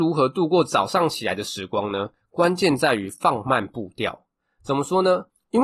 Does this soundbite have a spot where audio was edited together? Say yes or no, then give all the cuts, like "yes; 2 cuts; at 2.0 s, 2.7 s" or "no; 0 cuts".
no; 0 cuts